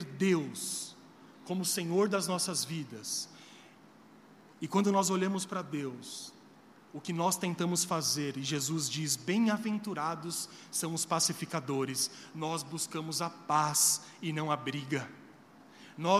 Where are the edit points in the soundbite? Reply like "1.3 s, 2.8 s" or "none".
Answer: none